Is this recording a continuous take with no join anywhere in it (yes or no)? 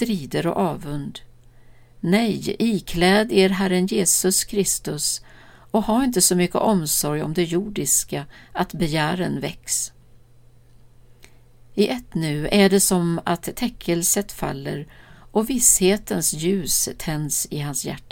yes